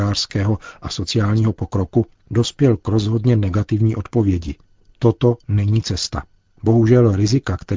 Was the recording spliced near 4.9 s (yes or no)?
no